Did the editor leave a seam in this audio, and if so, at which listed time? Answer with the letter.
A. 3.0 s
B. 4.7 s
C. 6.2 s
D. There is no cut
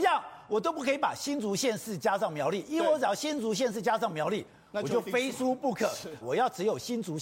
C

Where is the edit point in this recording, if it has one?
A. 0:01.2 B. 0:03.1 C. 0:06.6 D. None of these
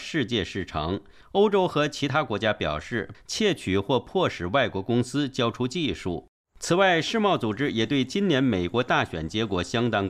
B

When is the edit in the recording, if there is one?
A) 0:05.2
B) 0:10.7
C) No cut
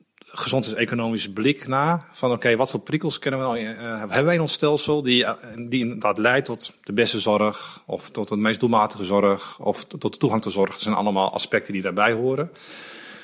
C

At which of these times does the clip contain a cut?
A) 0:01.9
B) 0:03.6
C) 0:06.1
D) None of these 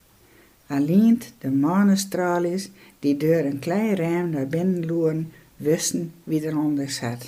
D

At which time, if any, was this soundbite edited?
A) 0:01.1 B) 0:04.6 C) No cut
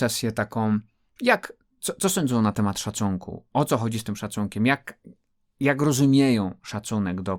C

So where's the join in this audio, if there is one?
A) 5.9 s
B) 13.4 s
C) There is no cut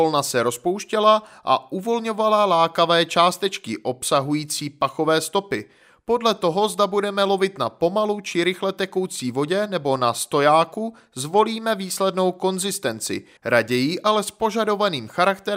B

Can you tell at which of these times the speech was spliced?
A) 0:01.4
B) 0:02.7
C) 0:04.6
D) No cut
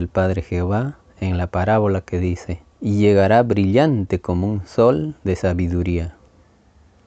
B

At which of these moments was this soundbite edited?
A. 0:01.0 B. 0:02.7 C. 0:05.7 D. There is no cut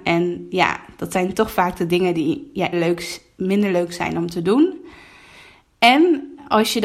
B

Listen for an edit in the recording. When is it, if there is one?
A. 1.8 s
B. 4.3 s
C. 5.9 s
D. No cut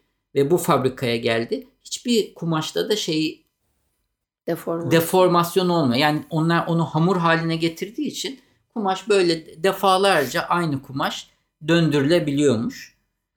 D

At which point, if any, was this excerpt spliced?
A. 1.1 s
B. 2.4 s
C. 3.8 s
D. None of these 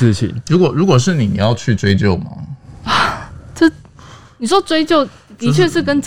D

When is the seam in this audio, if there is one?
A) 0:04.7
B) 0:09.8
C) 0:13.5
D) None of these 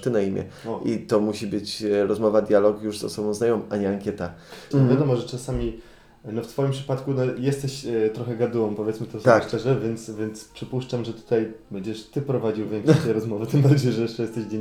A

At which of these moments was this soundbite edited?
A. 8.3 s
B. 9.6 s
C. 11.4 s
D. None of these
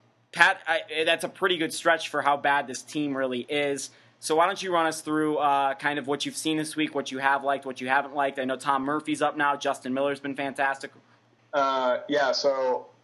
C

